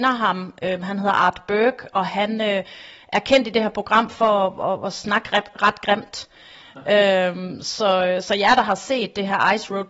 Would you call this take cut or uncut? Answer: uncut